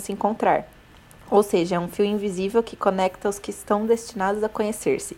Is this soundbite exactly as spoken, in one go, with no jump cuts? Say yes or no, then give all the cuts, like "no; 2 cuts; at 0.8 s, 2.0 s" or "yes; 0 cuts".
yes; 0 cuts